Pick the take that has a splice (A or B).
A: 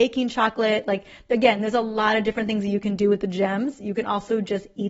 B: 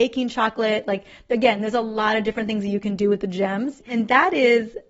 B